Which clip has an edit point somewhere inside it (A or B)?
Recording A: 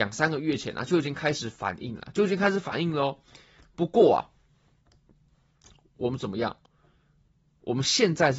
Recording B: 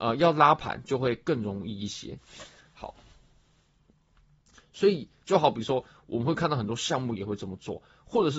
B